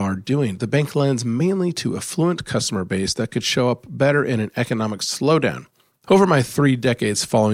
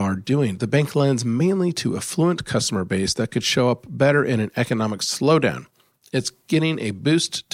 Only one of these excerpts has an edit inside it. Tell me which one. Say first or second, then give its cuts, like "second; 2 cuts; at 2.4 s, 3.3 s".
first; 1 cut; at 6.0 s